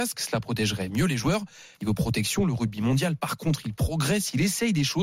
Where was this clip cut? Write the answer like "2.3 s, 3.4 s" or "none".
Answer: 1.7 s